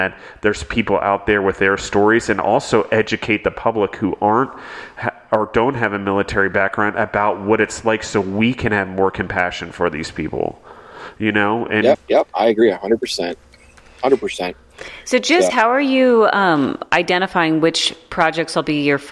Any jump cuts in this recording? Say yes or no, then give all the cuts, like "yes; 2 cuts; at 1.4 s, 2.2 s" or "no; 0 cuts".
yes; 2 cuts; at 11.9 s, 15.5 s